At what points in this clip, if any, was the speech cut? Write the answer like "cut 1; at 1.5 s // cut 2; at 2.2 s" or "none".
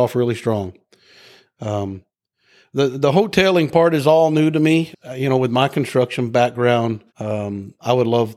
cut 1; at 4.9 s // cut 2; at 7.1 s